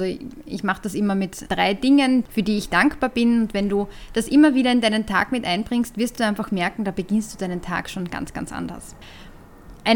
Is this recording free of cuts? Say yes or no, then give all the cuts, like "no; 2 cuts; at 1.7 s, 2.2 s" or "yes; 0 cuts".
yes; 0 cuts